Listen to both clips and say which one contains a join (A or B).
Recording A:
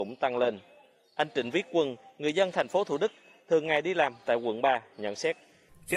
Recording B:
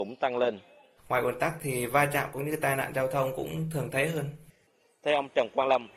B